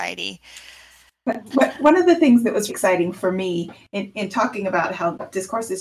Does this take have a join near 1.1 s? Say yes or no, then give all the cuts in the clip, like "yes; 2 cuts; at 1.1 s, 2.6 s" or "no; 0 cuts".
no; 1 cut; at 2.7 s